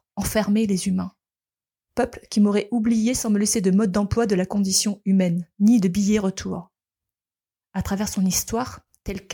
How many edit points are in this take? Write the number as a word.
three